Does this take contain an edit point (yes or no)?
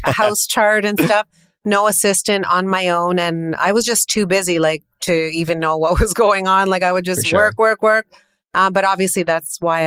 no